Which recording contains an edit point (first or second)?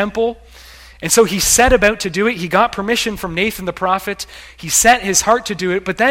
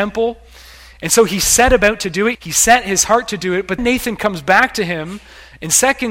second